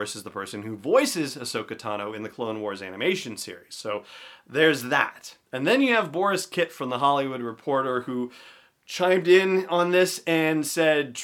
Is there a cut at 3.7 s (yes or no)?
no